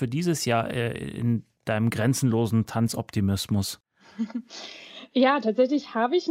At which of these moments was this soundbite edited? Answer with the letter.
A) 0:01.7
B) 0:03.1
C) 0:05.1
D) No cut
D